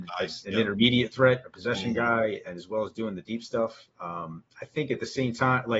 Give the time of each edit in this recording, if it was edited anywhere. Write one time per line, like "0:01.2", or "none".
none

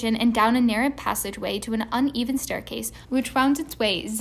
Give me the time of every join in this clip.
0:03.0

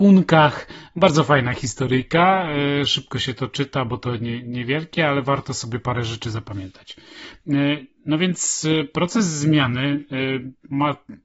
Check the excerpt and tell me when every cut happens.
none

